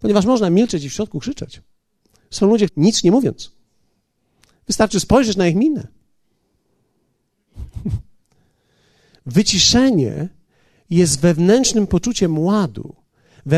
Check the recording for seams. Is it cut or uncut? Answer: cut